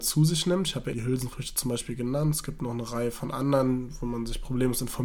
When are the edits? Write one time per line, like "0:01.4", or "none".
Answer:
0:00.9